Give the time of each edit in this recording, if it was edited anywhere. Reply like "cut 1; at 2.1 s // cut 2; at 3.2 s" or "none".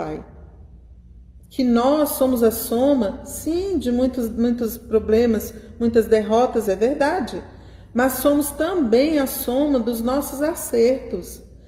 cut 1; at 6.6 s